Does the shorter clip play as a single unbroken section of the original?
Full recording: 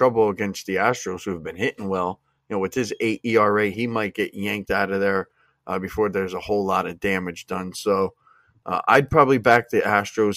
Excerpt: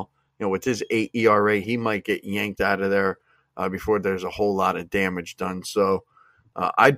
yes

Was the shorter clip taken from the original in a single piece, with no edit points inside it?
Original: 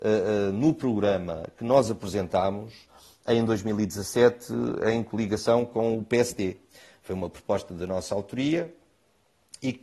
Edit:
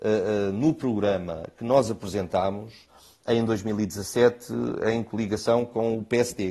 yes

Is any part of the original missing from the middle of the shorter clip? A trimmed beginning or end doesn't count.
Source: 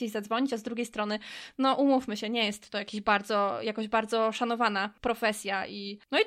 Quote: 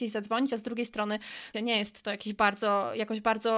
yes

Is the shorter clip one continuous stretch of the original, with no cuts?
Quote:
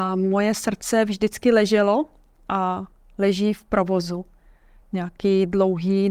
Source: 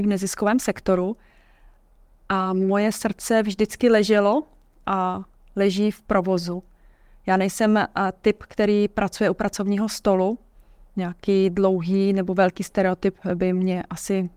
no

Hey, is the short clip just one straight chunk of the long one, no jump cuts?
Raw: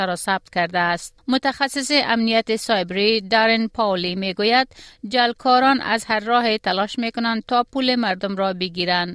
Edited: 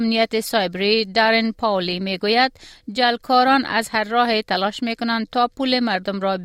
yes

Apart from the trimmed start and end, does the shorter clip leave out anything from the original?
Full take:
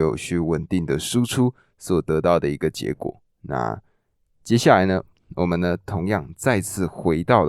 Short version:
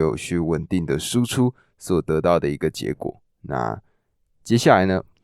no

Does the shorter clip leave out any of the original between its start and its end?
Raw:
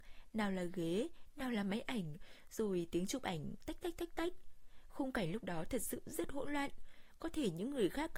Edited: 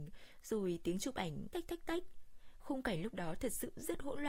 yes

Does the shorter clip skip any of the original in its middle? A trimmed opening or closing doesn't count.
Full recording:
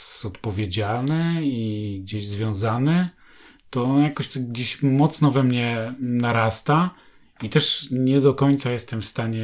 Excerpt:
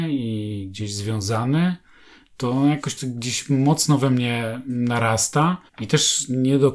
yes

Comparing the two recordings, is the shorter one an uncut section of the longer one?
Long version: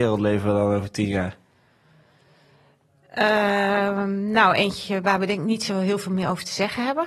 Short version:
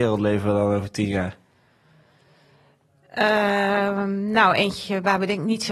yes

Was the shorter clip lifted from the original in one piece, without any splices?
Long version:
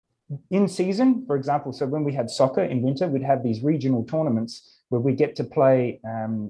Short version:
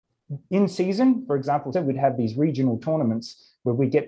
no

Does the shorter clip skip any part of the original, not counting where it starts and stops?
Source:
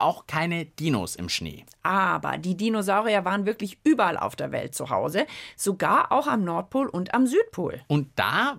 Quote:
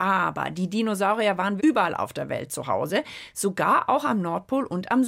yes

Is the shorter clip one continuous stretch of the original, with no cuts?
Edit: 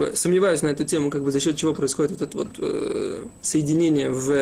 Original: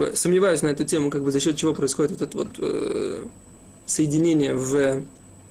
no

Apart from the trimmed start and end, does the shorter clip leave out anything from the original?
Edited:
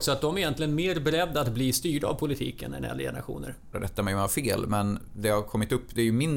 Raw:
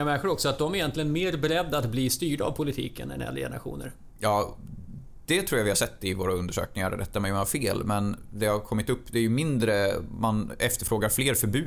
yes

